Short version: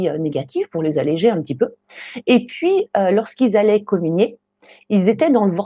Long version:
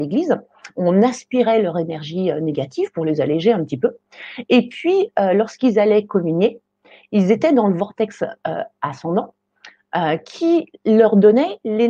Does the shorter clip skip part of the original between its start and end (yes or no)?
no